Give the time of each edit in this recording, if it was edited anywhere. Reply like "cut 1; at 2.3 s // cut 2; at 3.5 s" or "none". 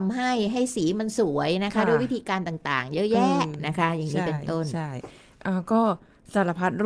none